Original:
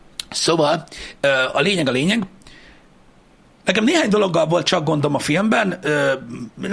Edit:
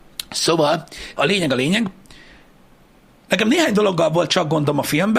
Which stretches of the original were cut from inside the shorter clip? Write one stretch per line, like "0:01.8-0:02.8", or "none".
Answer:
0:01.2-0:01.5